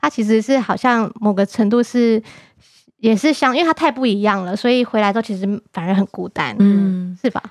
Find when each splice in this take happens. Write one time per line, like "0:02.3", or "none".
none

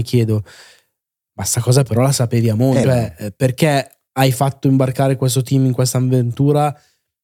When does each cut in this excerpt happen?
0:02.8
0:04.1

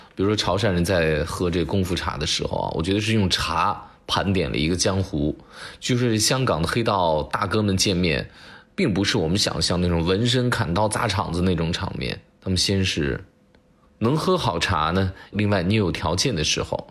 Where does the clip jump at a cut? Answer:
0:13.8
0:15.3

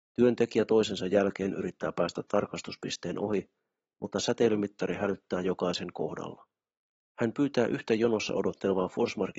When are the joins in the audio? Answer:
0:07.0

